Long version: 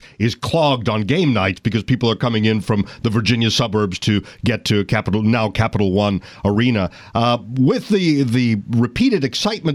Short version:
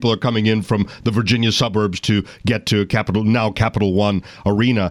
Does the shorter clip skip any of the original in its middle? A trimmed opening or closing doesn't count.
no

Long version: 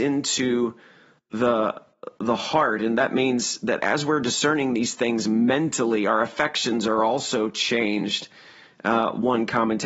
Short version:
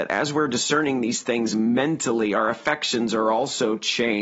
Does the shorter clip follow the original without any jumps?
yes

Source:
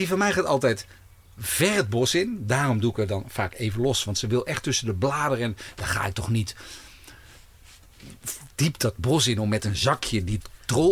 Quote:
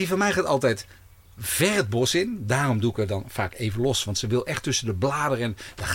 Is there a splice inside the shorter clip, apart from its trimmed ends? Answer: no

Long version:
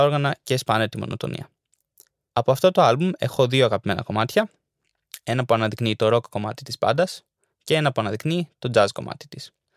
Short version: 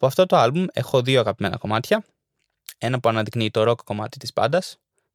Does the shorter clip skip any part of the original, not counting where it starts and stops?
no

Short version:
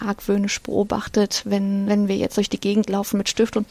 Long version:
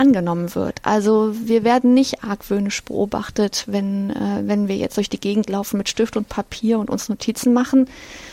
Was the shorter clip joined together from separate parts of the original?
yes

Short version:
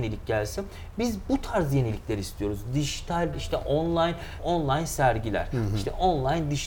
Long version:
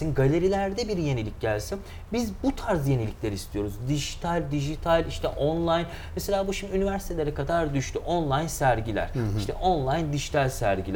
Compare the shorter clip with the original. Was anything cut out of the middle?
yes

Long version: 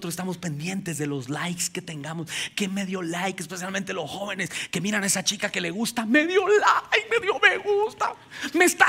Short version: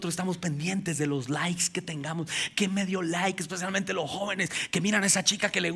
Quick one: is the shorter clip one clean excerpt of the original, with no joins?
yes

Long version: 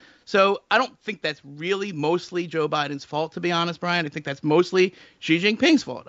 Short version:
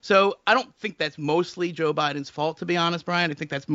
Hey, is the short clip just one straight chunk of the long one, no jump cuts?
no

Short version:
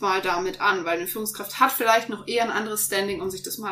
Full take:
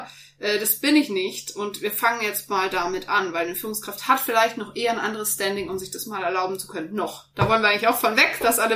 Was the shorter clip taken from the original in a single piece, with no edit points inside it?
yes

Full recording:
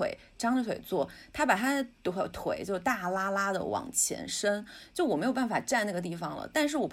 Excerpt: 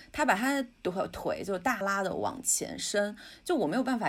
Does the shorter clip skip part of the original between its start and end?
yes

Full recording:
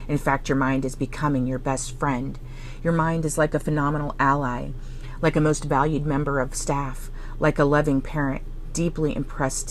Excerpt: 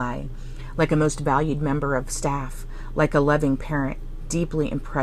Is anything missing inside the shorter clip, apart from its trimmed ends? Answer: no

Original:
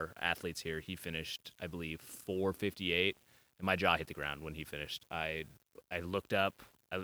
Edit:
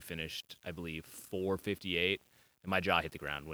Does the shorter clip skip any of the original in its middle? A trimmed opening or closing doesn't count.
no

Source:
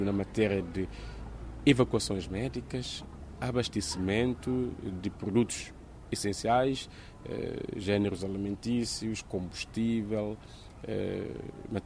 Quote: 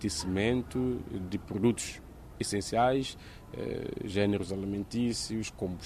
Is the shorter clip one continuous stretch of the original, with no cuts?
yes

